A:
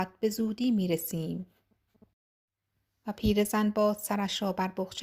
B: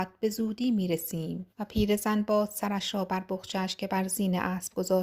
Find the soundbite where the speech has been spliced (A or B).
B